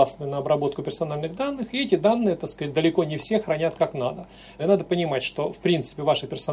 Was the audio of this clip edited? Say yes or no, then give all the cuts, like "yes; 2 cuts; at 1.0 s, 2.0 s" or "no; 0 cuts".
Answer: yes; 1 cut; at 4.6 s